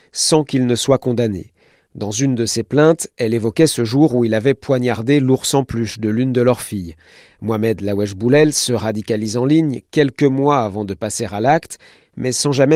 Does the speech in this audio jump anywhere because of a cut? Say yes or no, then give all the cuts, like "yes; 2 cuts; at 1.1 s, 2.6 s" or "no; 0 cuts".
no; 0 cuts